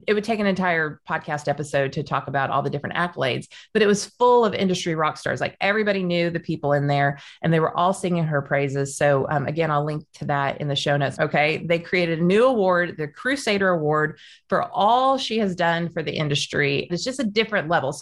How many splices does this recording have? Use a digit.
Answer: 2